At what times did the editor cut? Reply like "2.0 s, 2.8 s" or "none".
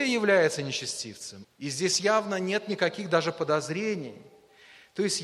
1.4 s